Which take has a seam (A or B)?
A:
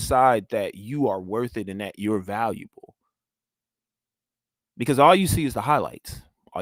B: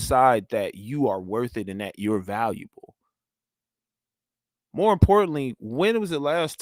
A